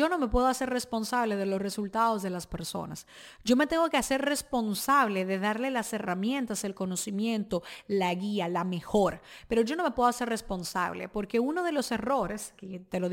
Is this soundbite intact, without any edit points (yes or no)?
yes